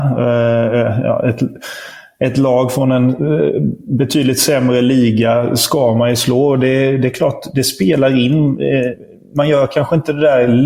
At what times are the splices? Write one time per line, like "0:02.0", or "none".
none